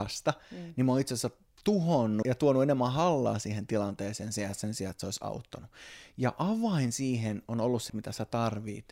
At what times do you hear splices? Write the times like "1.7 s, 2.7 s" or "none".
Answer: 2.2 s, 7.9 s

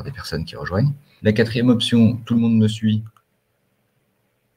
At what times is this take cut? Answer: 1.2 s

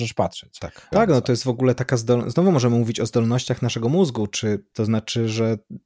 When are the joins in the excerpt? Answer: 0.9 s, 4.7 s

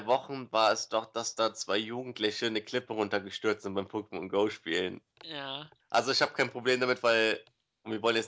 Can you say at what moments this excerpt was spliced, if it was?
5.8 s

